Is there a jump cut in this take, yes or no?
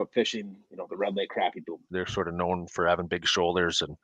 yes